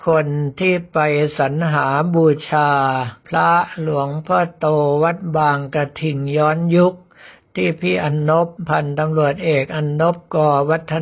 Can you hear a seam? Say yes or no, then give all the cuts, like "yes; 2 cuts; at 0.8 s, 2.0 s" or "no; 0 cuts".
no; 0 cuts